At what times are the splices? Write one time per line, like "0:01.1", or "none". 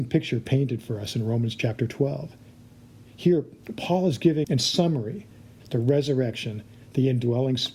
0:04.4
0:05.6